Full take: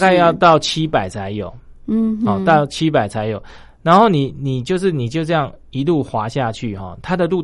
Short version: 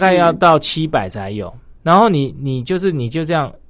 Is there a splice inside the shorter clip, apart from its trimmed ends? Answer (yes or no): yes